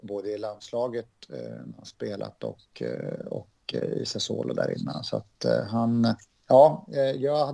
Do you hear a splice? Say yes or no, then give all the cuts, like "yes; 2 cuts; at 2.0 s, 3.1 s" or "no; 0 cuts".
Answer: no; 0 cuts